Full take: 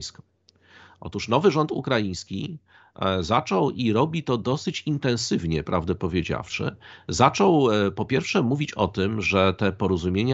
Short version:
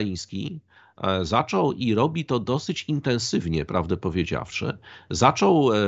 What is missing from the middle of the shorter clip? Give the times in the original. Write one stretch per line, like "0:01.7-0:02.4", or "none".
none